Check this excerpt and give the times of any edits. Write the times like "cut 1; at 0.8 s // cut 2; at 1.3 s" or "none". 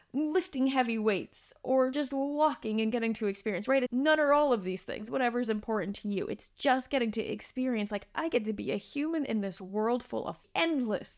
cut 1; at 3.9 s